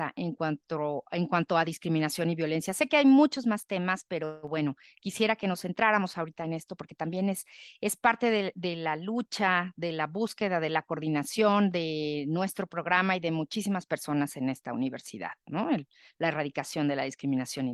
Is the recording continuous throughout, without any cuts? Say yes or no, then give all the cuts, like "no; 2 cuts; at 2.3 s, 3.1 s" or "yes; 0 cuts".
yes; 0 cuts